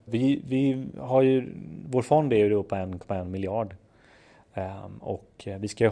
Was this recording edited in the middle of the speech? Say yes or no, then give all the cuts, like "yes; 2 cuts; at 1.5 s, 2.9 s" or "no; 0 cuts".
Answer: no; 0 cuts